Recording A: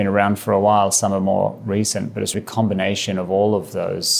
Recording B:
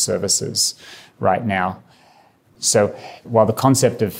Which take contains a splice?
A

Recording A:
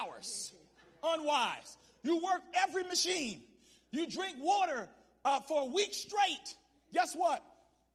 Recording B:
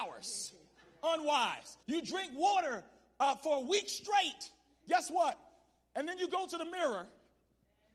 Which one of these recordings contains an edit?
B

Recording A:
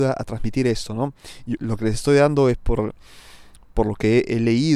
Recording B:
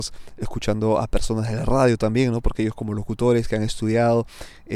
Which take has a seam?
A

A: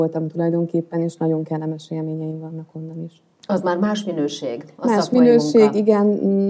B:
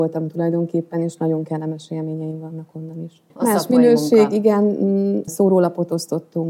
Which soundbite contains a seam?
B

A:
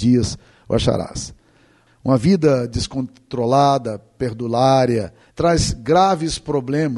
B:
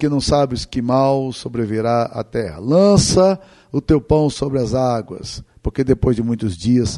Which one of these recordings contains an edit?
A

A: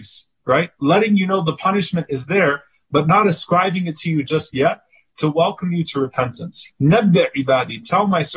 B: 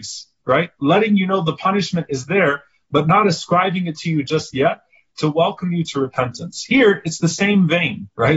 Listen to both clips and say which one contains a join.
A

